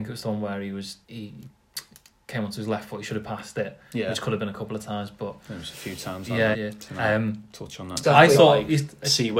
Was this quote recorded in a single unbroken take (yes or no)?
no